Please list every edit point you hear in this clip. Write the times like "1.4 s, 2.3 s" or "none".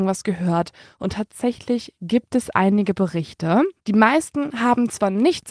3.8 s